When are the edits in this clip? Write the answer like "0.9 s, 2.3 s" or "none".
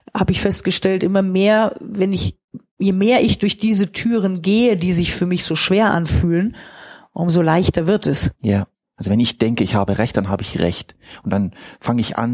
8.8 s